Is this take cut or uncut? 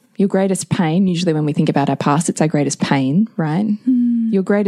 uncut